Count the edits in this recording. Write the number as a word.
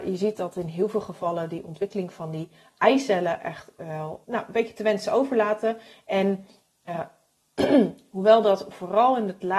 one